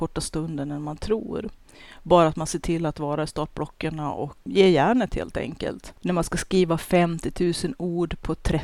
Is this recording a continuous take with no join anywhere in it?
no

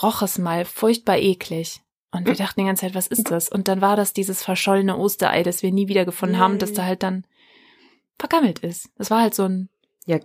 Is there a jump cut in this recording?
no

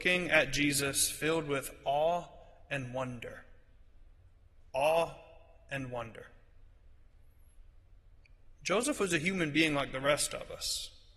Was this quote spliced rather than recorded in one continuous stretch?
no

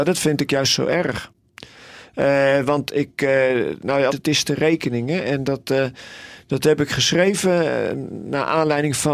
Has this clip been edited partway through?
yes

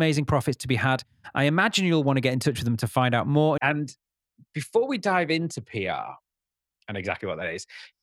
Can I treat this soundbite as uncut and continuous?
no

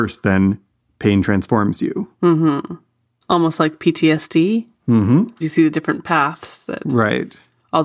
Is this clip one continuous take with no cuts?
no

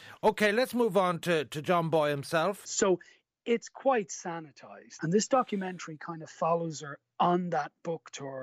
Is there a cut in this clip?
yes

